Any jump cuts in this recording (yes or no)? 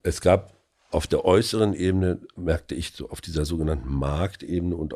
yes